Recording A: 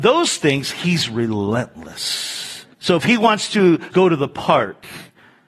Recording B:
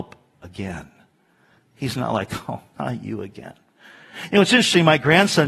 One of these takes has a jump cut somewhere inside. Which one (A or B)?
A